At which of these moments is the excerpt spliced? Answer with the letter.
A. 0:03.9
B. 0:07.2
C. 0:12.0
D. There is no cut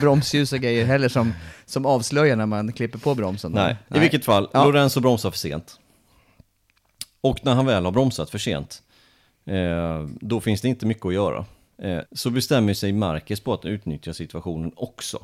C